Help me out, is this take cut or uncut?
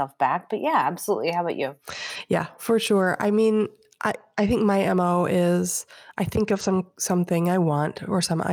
uncut